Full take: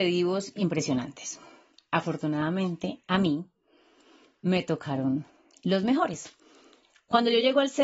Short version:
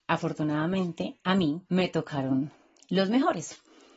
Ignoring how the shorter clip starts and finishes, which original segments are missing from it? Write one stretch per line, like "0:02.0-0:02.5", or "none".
0:03.5-0:04.4